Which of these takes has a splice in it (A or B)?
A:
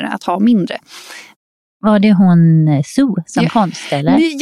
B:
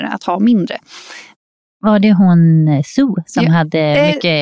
A